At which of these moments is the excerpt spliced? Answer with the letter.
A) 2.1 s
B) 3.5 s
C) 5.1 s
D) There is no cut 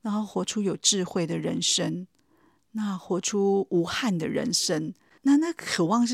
C